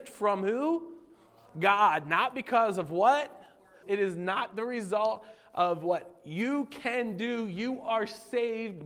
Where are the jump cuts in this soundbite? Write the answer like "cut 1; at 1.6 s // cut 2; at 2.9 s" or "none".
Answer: cut 1; at 3.8 s